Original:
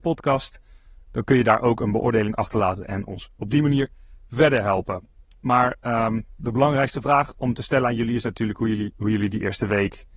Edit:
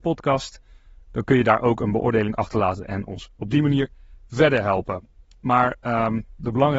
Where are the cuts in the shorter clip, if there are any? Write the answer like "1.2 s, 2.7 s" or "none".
none

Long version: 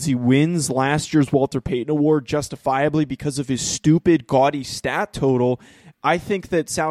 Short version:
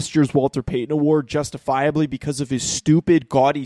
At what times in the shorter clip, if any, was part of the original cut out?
none

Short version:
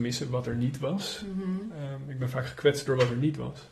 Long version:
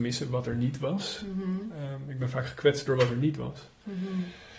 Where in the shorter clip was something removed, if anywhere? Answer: none

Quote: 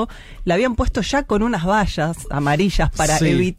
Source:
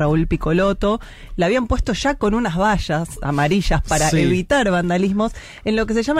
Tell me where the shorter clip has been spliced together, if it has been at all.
none

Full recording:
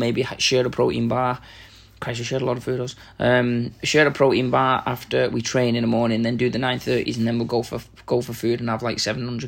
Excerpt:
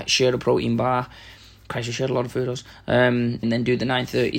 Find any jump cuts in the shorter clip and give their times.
3.4 s

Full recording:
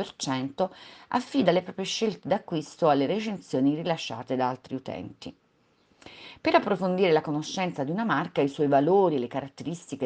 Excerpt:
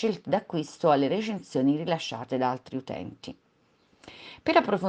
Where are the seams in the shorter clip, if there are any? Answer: none

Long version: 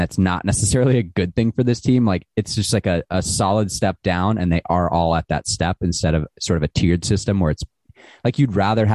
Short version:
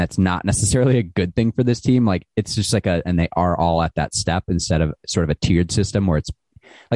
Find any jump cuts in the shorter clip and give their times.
3.0 s

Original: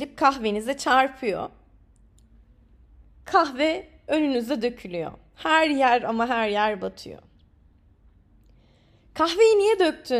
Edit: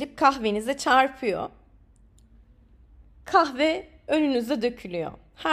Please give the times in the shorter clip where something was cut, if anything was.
none

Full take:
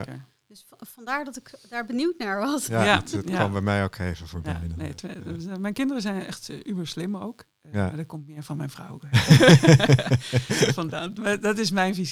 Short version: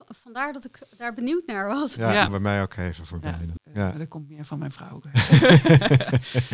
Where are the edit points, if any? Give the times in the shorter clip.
2.3 s, 3.6 s

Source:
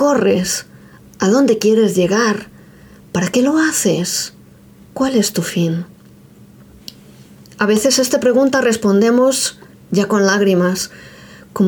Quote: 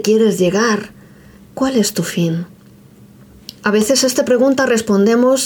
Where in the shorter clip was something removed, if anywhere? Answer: 1.4 s, 3.6 s

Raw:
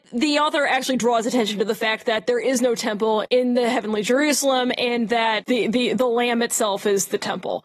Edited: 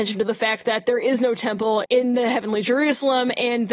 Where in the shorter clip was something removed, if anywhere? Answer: none

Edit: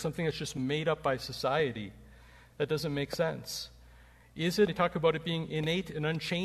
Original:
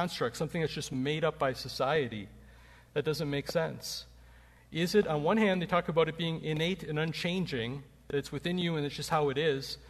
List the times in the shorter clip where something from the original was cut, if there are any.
4.7 s

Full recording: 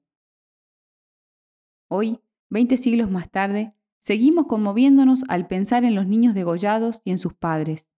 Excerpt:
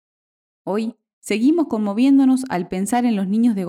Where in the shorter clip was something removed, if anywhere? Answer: 1.1 s

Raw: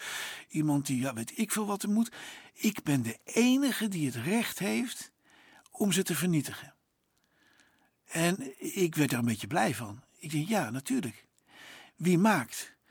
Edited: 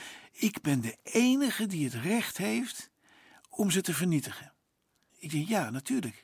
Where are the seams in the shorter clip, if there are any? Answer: 5.1 s

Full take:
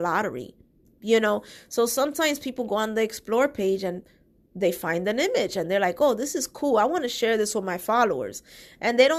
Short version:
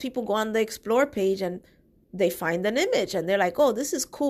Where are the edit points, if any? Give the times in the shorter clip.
none

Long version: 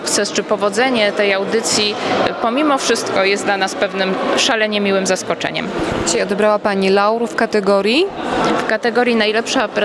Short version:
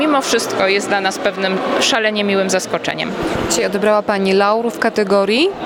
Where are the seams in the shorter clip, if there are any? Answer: none

